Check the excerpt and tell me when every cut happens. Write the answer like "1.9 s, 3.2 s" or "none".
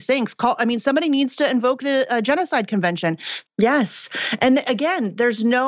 3.4 s